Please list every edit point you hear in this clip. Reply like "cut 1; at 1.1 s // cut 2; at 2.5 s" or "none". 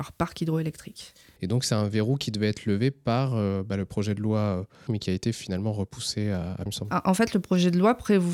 cut 1; at 4.9 s // cut 2; at 6.7 s